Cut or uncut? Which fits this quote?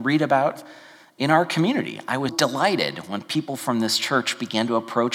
cut